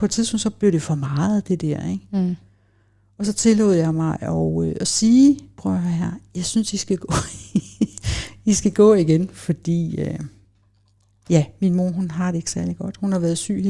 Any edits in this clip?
no; 0 cuts

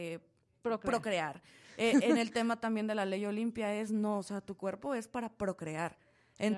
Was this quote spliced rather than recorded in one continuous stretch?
no; 0 cuts

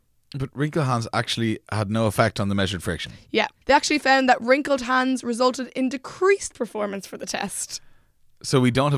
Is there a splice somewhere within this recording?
no; 0 cuts

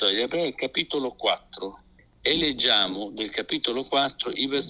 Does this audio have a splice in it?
no; 0 cuts

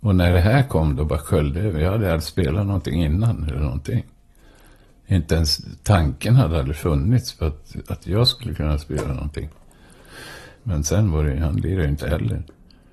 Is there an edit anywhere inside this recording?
yes; 1 cut; at 10.6 s

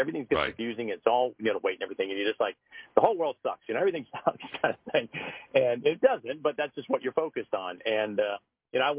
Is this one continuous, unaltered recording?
yes; 0 cuts

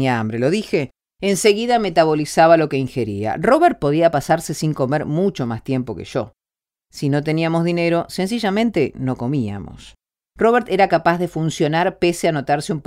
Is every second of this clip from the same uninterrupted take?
yes; 0 cuts

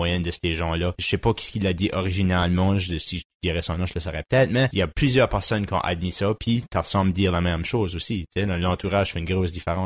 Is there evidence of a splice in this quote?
no; 0 cuts

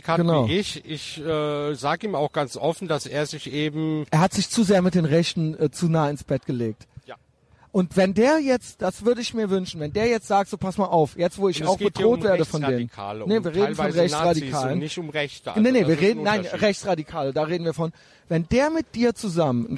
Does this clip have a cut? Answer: no; 0 cuts

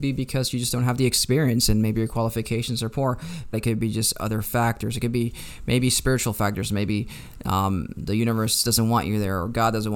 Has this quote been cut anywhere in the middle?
yes; 1 cut; at 3.5 s

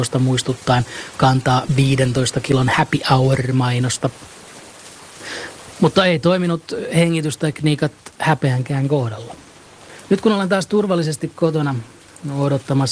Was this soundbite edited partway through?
no; 0 cuts

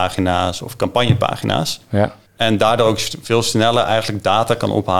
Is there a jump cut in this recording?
yes; 1 cut; at 2.2 s

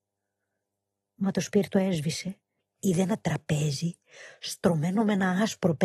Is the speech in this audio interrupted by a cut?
yes; 1 cut; at 2.6 s

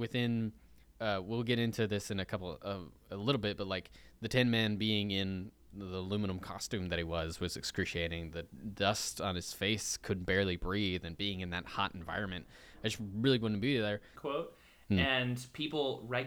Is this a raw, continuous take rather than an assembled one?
no; 1 cut; at 14.2 s

